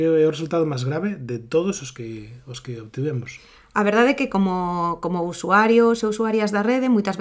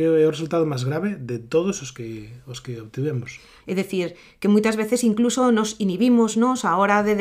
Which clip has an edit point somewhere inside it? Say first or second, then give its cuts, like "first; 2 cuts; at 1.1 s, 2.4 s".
second; 1 cut; at 3.6 s